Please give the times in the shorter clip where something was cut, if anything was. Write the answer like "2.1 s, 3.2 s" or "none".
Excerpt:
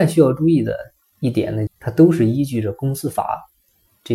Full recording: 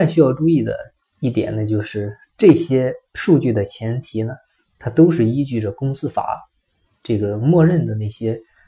1.7 s